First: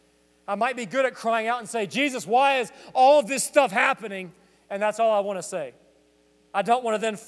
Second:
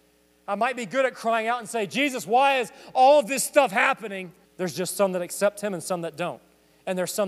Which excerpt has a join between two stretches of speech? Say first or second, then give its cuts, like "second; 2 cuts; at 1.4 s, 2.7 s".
second; 1 cut; at 4.5 s